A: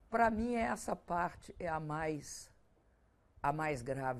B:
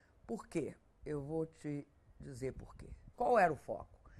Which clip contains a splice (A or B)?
B